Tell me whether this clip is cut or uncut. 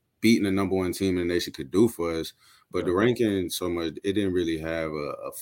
uncut